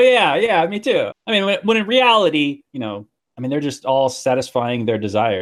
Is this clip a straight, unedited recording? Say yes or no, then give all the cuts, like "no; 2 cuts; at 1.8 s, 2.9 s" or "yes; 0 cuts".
no; 2 cuts; at 1.1 s, 2.7 s